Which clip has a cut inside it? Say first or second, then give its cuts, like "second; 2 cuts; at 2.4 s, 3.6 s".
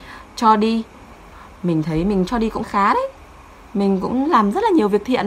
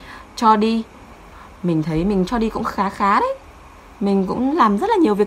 first; 1 cut; at 2.6 s